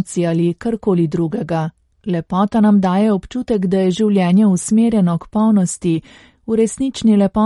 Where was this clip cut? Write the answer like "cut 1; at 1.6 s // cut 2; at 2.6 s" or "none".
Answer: cut 1; at 1.9 s